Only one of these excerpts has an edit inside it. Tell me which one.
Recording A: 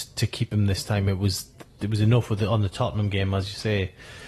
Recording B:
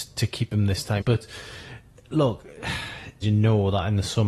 B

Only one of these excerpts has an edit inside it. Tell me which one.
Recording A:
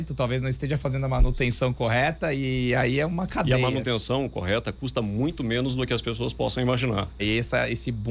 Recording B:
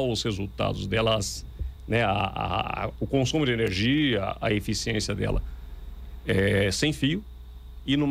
A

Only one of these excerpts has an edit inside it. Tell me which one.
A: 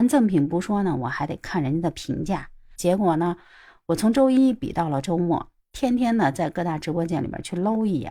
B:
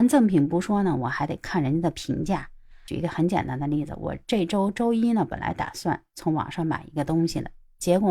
A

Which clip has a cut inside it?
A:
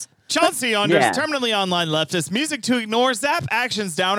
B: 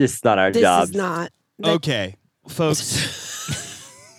B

